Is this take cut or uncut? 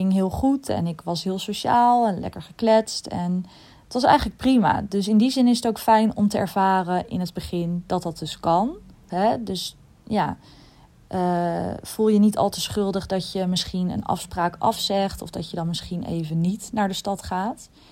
cut